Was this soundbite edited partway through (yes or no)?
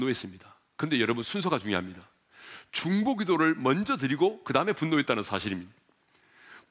no